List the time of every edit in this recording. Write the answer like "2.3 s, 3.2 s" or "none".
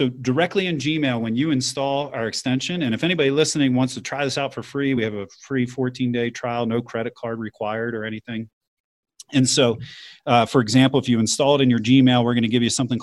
none